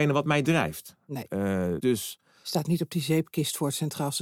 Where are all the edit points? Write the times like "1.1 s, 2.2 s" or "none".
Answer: 1.8 s